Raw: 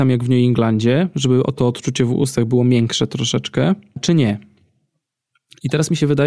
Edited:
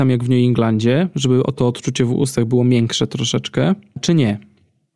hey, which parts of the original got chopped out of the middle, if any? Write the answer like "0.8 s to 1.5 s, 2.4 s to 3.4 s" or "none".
none